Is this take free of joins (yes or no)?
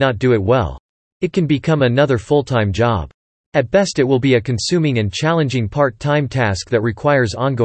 yes